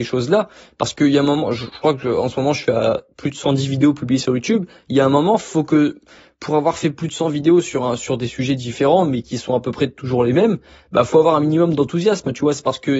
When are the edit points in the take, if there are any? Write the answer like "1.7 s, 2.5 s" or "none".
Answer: none